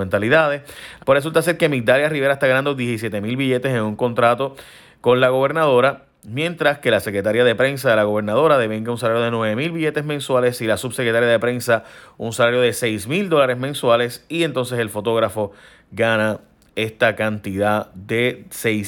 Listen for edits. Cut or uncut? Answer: cut